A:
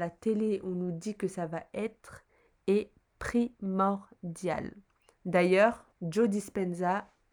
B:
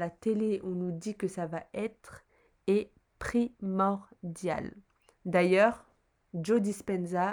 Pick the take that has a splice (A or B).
A